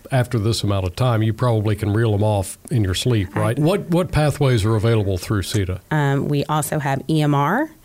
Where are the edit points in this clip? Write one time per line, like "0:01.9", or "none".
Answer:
0:03.6
0:05.9